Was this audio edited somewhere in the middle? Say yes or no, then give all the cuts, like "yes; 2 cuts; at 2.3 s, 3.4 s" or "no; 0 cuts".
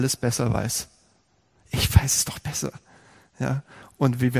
no; 0 cuts